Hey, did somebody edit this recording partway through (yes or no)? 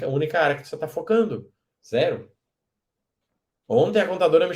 yes